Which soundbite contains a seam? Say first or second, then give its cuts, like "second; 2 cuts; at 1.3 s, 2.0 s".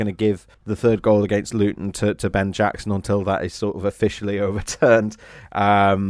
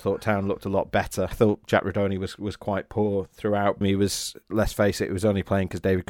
second; 2 cuts; at 1.3 s, 3.8 s